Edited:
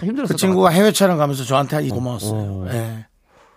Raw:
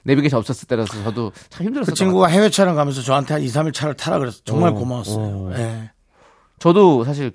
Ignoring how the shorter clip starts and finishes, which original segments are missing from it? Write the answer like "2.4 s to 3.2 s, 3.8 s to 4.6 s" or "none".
3.5 s to 4.8 s